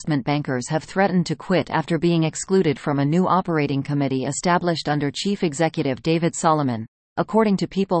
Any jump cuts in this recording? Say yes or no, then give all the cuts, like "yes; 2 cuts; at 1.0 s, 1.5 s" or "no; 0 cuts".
no; 0 cuts